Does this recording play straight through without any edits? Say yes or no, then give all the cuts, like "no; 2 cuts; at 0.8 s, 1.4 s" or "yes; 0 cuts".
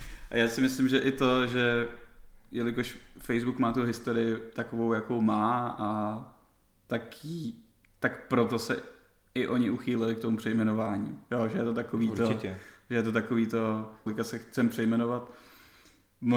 no; 1 cut; at 14.1 s